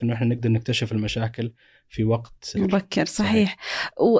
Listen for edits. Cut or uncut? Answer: cut